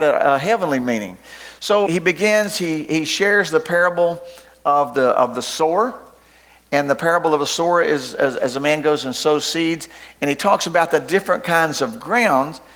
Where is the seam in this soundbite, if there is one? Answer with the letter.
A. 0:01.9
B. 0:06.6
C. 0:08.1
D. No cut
A